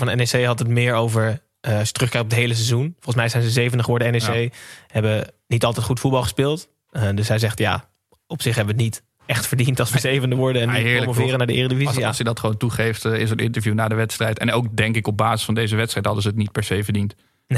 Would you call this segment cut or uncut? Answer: uncut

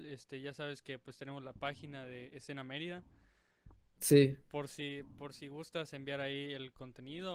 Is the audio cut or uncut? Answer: uncut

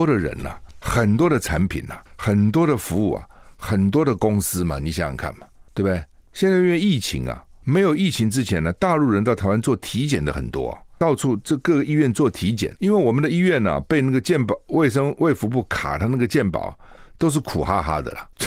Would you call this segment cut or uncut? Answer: uncut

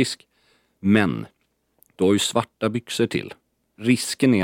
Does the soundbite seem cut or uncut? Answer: uncut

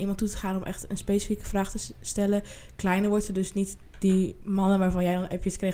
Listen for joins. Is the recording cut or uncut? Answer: uncut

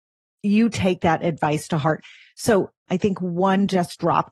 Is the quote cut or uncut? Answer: cut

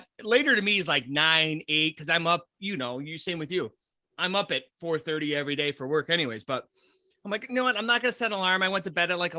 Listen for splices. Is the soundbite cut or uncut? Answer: uncut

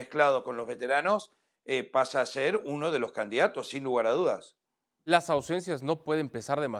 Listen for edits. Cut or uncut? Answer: uncut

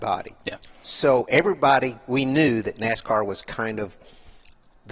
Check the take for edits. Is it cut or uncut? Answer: uncut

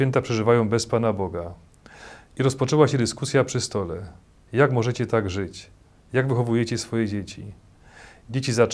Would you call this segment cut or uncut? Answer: uncut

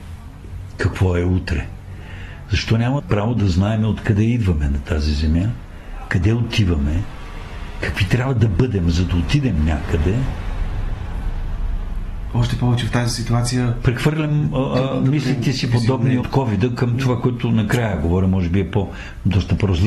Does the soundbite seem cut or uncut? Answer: cut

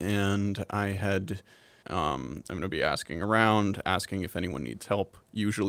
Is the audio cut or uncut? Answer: cut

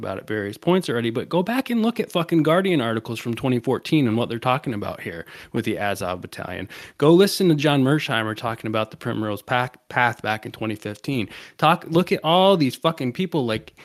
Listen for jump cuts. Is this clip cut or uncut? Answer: uncut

